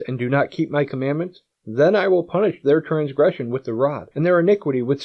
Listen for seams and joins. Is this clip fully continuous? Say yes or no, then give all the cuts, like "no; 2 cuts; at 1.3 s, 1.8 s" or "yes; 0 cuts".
no; 1 cut; at 4.1 s